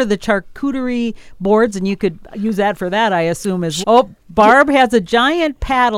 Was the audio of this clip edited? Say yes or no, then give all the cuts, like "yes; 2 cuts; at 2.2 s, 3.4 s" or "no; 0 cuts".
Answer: yes; 1 cut; at 3.8 s